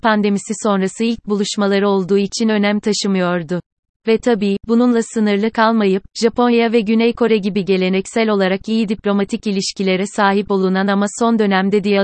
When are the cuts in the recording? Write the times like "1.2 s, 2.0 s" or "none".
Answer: 3.9 s